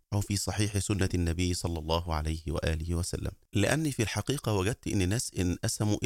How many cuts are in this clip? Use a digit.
1